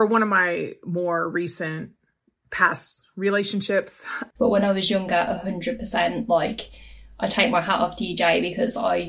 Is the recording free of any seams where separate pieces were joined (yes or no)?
no